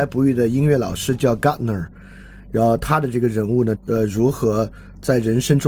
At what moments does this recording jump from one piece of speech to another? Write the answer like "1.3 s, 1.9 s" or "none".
3.8 s